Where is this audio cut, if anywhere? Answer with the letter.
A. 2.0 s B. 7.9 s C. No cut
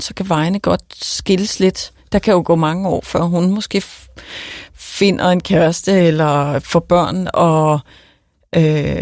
C